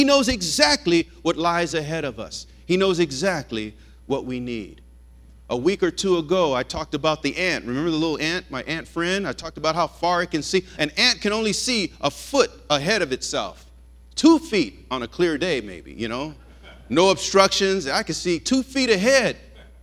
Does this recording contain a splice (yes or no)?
no